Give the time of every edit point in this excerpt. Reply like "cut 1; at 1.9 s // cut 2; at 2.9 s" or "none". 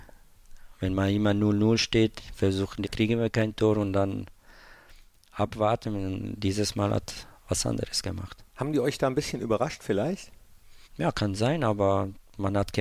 cut 1; at 2.8 s // cut 2; at 10.8 s